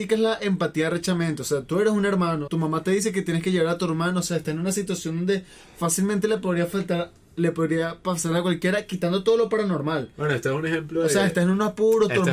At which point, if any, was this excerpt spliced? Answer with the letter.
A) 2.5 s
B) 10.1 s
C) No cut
A